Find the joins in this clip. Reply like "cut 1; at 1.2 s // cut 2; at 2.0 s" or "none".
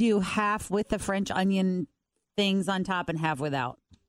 none

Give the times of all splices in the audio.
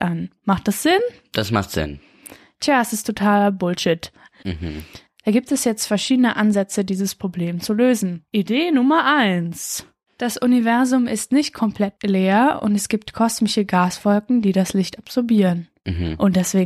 cut 1; at 4.4 s

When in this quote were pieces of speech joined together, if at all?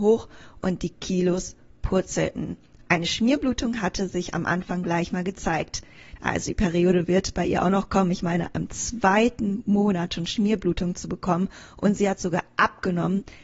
cut 1; at 6.2 s

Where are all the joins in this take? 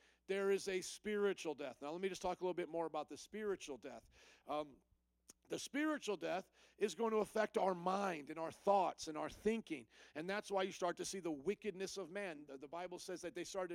none

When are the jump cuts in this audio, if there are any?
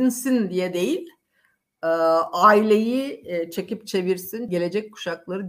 cut 1; at 4.5 s

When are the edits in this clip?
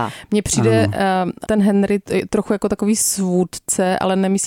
cut 1; at 1.4 s

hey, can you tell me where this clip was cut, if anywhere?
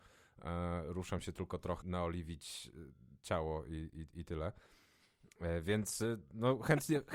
cut 1; at 1.8 s

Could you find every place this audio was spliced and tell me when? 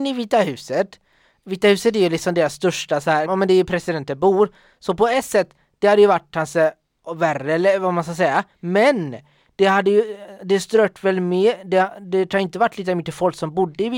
cut 1; at 3.3 s

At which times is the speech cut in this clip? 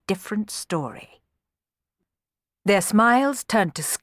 none

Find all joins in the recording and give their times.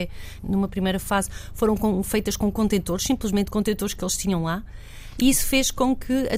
none

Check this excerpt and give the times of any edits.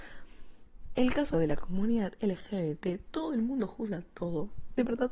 cut 1; at 1.3 s

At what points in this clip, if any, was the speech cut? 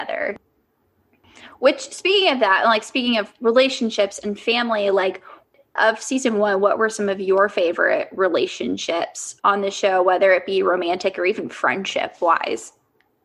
none

